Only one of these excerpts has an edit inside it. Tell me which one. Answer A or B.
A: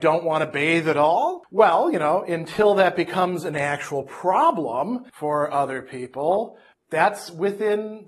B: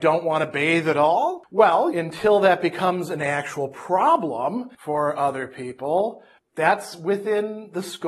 B